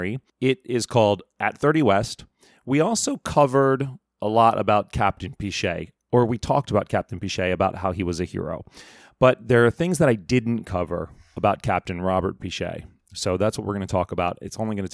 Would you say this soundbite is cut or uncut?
uncut